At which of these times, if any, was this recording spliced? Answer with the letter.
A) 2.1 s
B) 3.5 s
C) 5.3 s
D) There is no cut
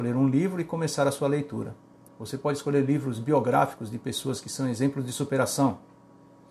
A